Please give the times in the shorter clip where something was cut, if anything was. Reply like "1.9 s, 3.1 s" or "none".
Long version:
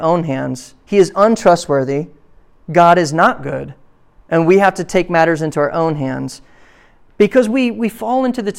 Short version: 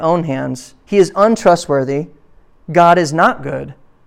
none